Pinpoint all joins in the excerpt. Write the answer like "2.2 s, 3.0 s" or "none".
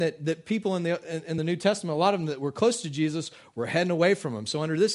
none